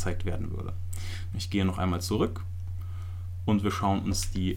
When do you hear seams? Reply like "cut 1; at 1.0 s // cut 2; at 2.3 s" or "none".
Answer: cut 1; at 1.3 s